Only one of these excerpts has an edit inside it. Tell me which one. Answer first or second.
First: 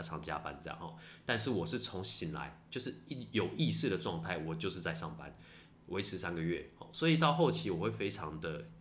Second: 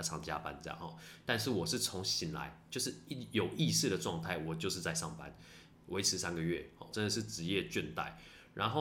second